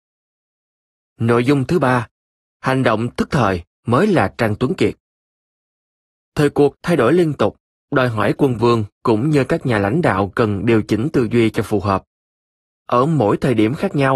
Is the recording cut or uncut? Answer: uncut